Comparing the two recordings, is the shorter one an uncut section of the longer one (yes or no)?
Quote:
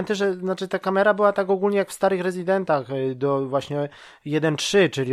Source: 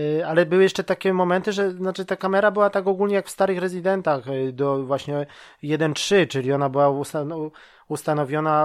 yes